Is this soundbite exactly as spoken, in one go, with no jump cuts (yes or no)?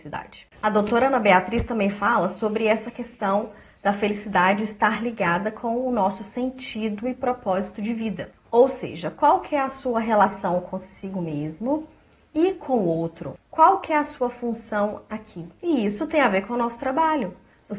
yes